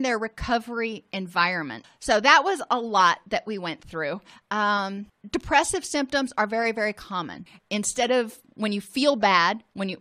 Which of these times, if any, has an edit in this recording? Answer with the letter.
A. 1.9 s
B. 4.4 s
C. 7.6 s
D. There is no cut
C